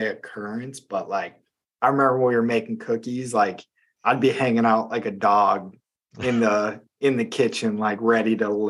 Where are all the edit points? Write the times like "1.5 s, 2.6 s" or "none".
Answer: none